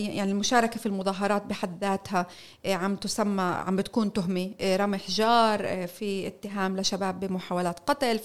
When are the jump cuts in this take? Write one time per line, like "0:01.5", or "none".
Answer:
none